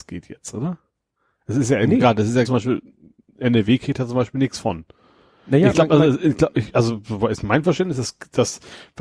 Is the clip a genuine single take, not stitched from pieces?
no; 1 cut; at 2.4 s

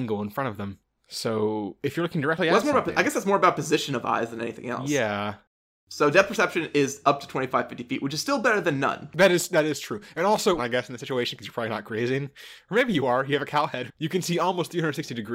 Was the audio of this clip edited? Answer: yes; 2 cuts; at 10.6 s, 13.9 s

